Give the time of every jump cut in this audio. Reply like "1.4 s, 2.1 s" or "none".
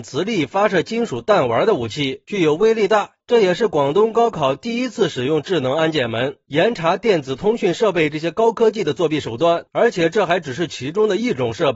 3.2 s, 9.7 s